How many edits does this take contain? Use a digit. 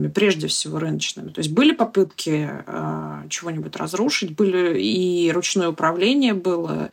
0